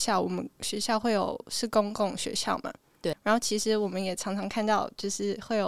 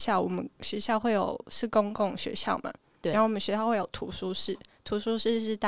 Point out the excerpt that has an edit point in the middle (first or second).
first